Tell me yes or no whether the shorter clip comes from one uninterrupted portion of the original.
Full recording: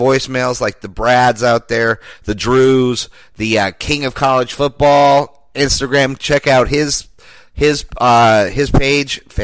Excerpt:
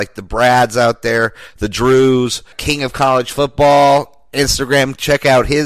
no